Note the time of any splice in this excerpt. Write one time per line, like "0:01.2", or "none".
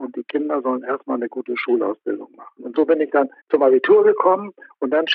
0:03.4